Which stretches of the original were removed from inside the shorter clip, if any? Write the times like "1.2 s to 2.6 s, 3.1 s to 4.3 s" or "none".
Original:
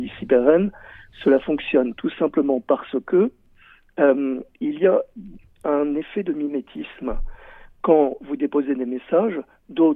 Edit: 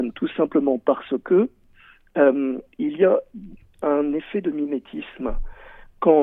none

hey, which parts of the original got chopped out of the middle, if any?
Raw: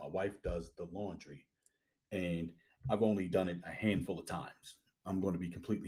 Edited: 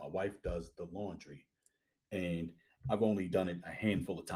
none

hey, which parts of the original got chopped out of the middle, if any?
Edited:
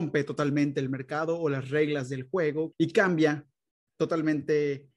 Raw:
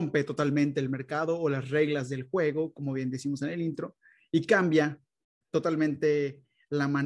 2.7 s to 4.3 s

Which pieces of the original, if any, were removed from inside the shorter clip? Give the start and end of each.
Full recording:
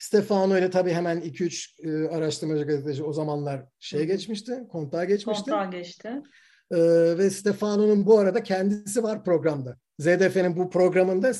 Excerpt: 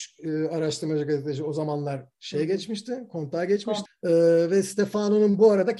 5.4 s to 6.5 s

